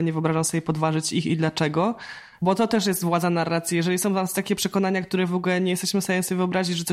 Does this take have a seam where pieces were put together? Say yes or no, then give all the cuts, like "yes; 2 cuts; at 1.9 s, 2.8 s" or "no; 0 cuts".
no; 0 cuts